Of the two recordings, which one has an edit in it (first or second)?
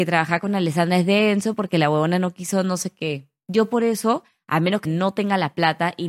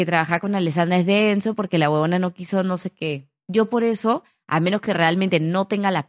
first